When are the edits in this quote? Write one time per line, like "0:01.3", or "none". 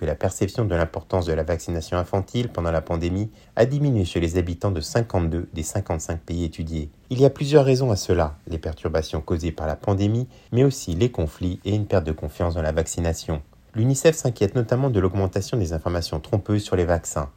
0:07.0